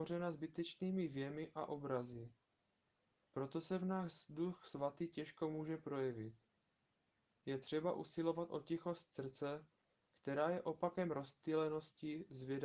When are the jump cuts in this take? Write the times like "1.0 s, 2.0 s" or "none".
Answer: none